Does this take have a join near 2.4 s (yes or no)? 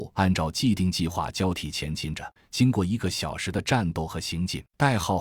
yes